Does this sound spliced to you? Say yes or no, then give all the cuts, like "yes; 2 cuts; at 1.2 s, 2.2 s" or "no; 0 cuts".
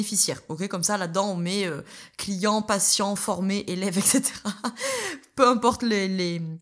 no; 0 cuts